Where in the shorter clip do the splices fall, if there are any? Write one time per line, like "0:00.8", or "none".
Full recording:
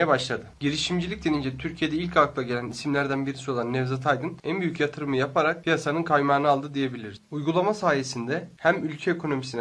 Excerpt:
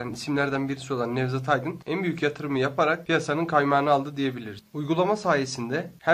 none